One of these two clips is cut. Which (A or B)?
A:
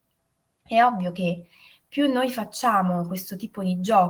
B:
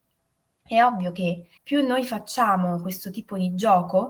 B